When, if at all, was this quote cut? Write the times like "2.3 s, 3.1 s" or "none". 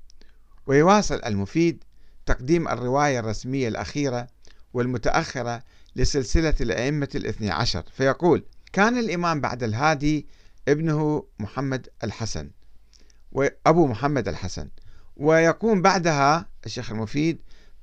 8.7 s